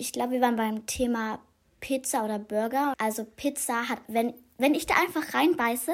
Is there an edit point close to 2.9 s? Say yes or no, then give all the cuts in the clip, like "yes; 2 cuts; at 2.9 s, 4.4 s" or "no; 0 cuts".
yes; 2 cuts; at 2.9 s, 4.0 s